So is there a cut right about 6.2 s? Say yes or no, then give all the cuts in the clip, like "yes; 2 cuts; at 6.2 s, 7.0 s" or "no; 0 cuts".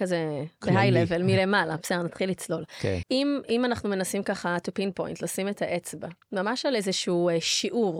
yes; 2 cuts; at 3.0 s, 6.2 s